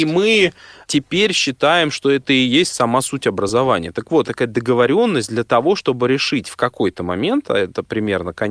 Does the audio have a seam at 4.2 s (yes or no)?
yes